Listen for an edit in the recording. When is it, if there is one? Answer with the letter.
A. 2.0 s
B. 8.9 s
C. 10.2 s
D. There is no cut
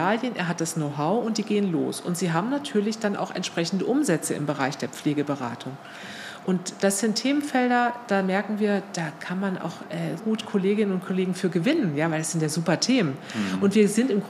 C